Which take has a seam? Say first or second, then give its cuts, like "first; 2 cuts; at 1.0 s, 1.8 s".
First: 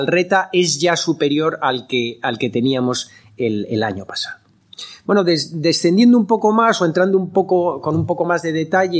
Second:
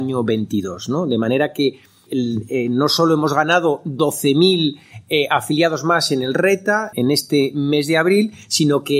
second; 2 cuts; at 2.1 s, 6.9 s